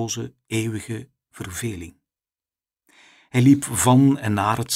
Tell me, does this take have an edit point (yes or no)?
no